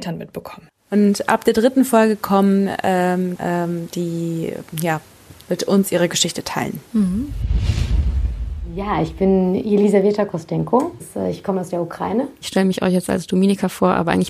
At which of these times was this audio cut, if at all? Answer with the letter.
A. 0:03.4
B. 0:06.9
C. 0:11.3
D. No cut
A